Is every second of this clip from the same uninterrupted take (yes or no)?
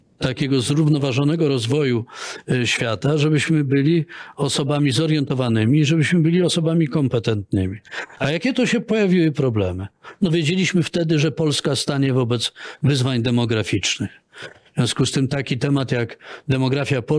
yes